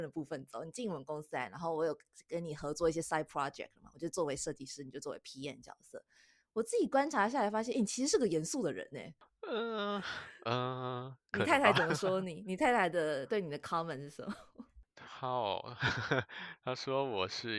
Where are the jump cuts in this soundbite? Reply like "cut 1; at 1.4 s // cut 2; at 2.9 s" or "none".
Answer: none

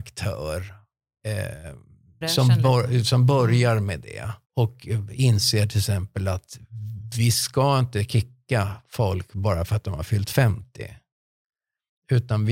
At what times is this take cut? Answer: cut 1; at 2.2 s // cut 2; at 4.4 s

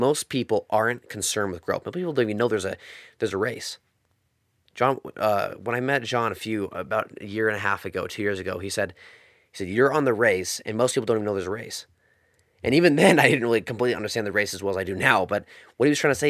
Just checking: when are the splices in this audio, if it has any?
none

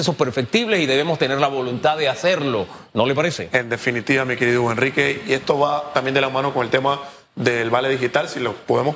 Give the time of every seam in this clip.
none

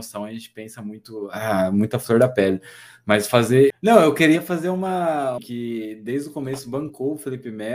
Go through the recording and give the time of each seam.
cut 1; at 3.7 s // cut 2; at 5.4 s

